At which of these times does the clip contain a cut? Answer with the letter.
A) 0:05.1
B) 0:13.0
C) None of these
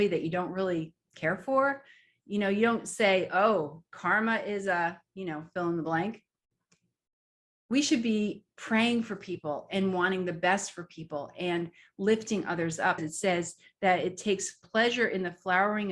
B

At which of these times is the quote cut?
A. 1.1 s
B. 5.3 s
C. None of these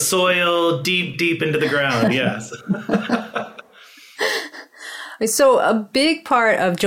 A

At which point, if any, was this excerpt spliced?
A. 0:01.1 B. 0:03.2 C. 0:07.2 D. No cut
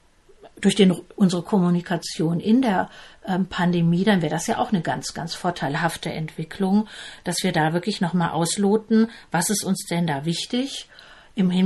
A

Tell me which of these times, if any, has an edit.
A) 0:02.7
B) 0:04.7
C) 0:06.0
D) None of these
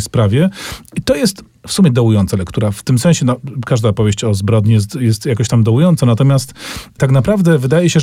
D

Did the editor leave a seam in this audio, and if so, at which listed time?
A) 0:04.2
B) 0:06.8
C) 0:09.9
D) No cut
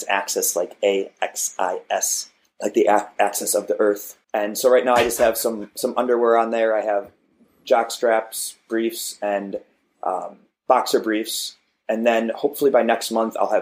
A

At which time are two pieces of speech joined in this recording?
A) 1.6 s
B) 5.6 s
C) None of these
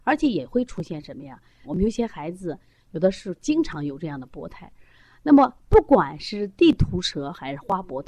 A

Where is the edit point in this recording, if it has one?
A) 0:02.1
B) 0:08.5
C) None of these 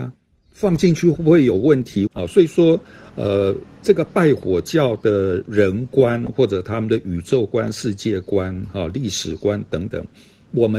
A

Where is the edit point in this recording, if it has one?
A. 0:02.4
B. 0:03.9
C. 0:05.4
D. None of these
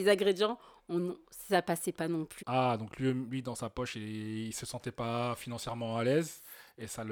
A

